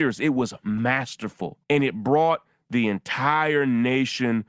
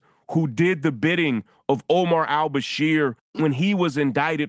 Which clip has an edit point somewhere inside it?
first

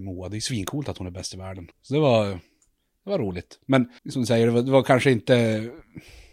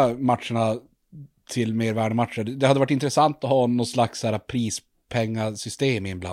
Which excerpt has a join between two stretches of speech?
first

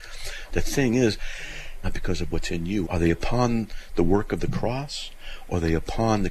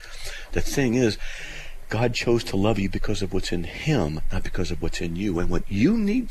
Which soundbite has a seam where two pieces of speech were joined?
first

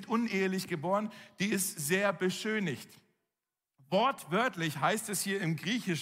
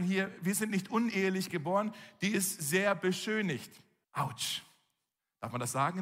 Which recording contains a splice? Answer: second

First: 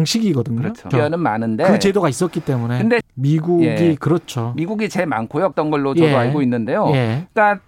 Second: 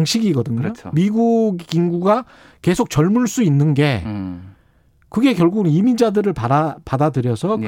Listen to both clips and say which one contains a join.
first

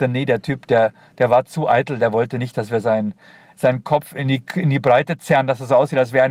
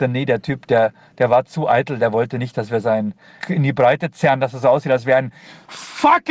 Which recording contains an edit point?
second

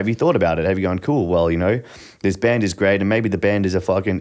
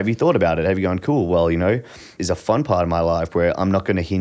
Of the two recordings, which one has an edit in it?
second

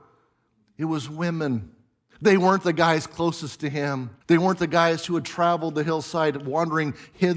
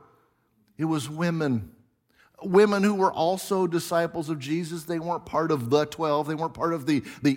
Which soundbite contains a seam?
first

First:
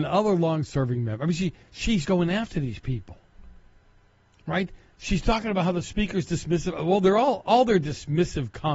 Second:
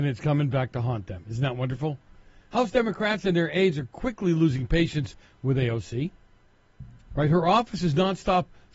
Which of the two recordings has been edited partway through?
first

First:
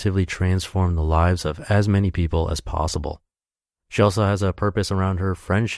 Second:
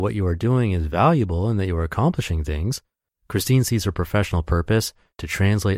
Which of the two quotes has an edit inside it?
second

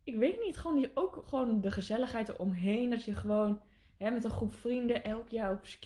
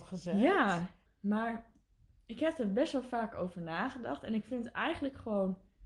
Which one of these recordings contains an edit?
second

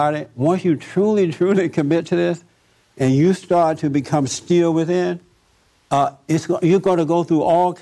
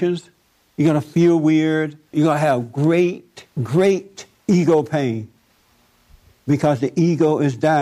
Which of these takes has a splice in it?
second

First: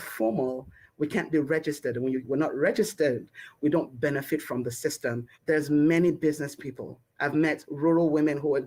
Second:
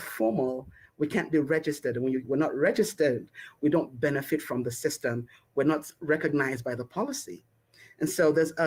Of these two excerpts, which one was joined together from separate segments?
first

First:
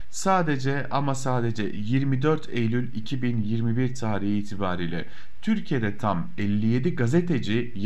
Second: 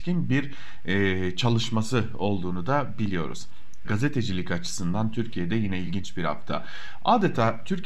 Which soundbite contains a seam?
second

